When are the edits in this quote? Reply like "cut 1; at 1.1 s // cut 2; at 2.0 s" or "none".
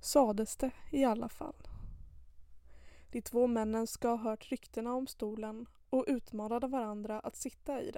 cut 1; at 3.1 s